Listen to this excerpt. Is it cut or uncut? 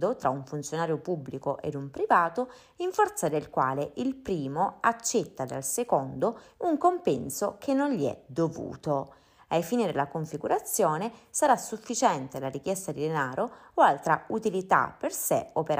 cut